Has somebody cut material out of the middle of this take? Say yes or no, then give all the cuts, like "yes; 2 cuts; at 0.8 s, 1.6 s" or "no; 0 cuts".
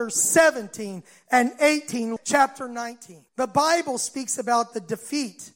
yes; 2 cuts; at 2.2 s, 3.3 s